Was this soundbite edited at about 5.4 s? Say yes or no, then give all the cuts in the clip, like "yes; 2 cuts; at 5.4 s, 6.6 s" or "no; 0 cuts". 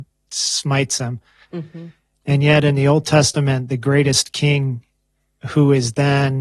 no; 1 cut; at 1.4 s